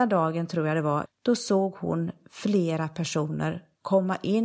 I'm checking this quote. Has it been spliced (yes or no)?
yes